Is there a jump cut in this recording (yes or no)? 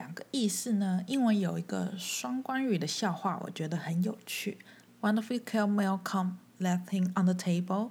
yes